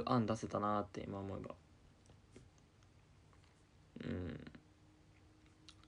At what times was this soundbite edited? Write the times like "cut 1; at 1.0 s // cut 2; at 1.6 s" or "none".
none